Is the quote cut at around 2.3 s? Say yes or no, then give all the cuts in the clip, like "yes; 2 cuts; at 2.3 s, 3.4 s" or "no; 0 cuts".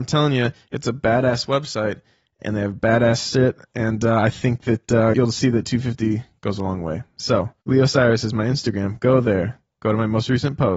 no; 2 cuts; at 5.1 s, 7.6 s